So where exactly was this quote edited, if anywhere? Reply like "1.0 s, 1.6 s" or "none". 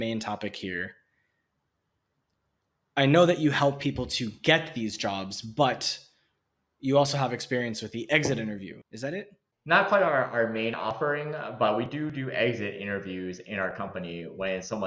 8.8 s